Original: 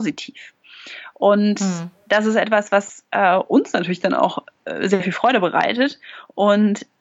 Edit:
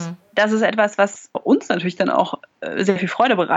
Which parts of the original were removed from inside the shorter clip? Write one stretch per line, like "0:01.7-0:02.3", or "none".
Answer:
0:03.1-0:03.4